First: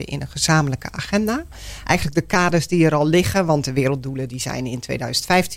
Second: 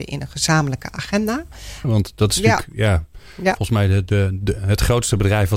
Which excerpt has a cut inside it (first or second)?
second